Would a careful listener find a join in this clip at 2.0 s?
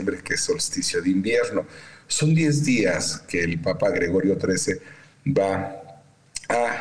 no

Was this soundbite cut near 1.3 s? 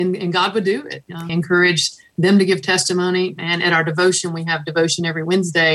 yes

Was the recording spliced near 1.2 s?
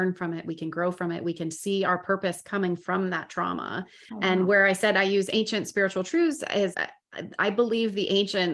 no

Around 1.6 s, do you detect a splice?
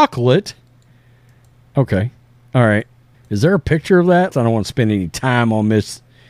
no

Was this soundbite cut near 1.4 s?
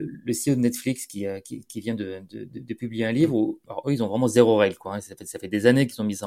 no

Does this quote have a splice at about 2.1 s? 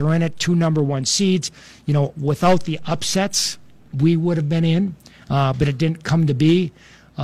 no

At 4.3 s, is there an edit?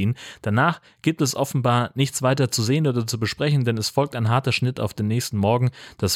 no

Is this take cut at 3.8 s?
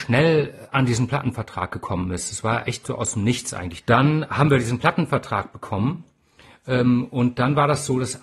yes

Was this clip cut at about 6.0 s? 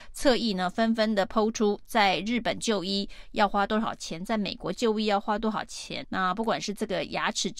yes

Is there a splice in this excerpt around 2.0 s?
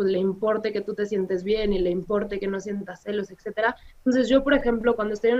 no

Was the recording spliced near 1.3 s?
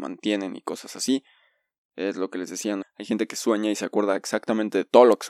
no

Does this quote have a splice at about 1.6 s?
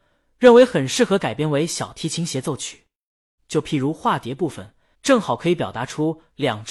no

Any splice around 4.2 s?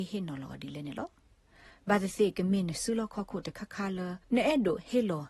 yes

